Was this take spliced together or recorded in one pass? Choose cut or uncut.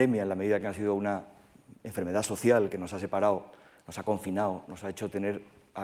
uncut